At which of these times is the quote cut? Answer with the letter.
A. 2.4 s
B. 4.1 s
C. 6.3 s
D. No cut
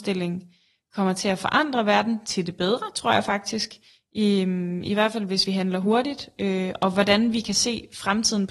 D